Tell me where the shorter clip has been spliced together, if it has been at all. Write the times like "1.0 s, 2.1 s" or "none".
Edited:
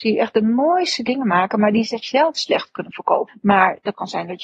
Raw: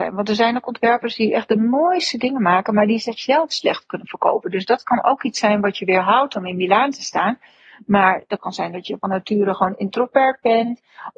3.3 s